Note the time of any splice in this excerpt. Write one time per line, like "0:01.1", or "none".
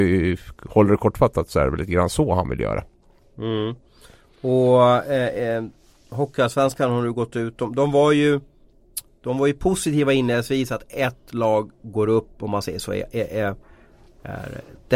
none